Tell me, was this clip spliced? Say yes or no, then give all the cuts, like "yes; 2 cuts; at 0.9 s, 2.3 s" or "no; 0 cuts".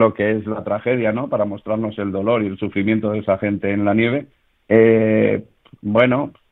yes; 1 cut; at 4.6 s